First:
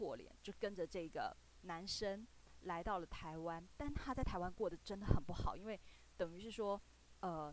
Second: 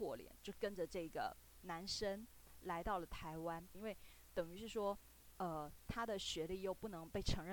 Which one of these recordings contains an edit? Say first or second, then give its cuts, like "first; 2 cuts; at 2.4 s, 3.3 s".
second; 1 cut; at 3.7 s